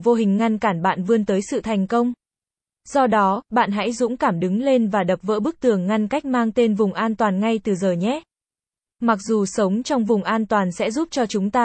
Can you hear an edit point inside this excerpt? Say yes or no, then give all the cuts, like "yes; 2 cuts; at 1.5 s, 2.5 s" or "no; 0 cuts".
no; 0 cuts